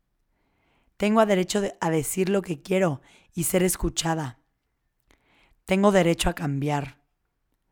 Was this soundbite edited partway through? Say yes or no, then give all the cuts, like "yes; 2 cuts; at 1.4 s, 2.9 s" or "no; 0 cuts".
no; 0 cuts